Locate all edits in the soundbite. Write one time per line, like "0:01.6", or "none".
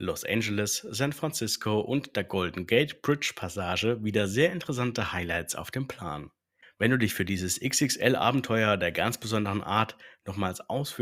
0:06.6